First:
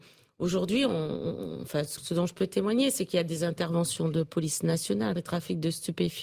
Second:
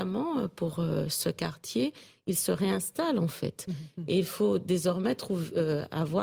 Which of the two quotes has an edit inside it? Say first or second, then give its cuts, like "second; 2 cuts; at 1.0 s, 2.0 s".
first; 2 cuts; at 2.0 s, 5.2 s